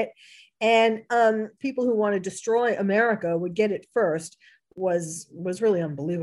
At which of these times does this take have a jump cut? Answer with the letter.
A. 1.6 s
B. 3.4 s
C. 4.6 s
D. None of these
A